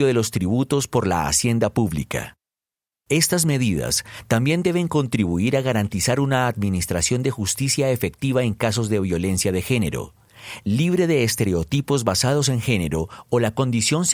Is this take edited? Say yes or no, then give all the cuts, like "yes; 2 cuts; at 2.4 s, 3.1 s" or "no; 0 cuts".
yes; 1 cut; at 2.9 s